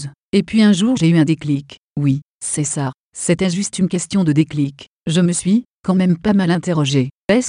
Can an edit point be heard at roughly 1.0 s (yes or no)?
yes